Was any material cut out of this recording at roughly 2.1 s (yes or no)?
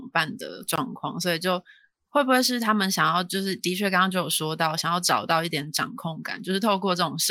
no